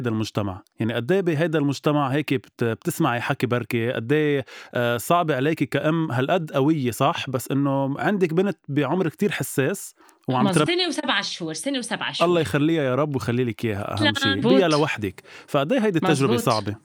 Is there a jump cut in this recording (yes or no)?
yes